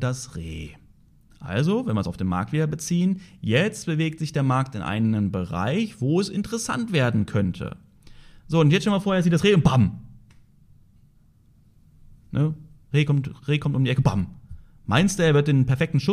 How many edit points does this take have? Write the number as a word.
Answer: zero